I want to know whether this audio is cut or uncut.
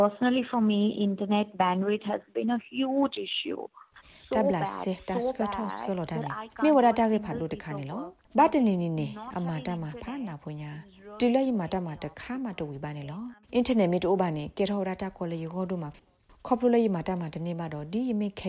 cut